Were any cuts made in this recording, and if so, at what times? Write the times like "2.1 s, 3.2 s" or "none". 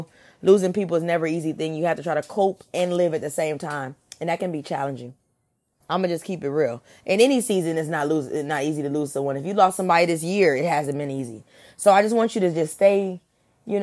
5.8 s